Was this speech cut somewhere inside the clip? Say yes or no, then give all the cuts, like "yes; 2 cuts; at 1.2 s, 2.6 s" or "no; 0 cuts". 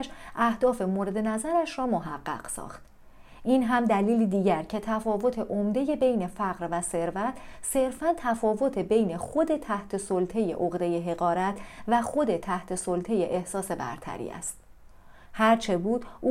yes; 1 cut; at 15.3 s